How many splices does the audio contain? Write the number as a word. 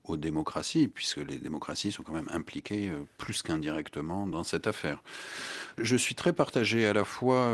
one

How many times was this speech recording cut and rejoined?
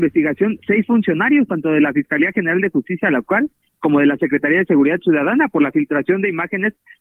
zero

